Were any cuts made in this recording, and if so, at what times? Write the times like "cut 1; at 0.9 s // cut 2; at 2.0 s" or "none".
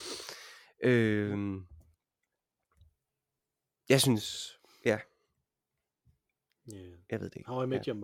none